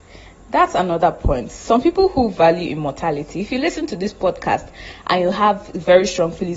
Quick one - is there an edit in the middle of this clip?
no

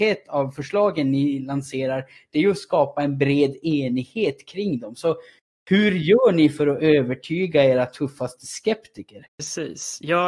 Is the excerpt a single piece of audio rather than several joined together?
yes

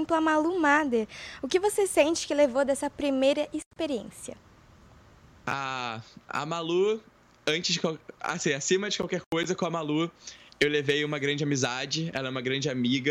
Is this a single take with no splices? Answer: yes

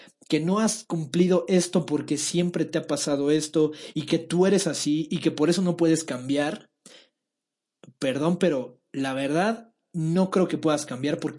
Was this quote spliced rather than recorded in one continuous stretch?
no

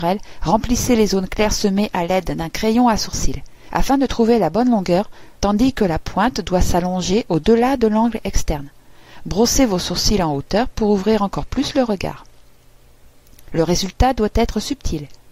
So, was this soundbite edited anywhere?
yes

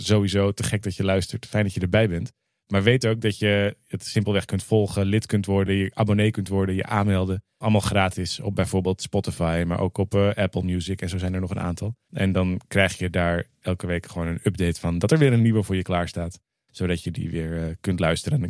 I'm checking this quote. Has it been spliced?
no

